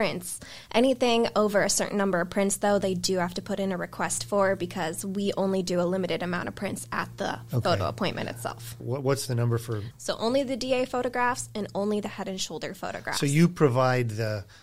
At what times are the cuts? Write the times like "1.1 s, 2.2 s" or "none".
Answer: 8.8 s, 9.9 s